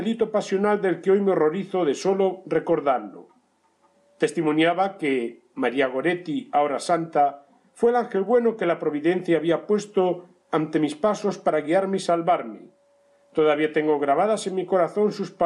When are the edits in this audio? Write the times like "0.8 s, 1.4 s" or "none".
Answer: none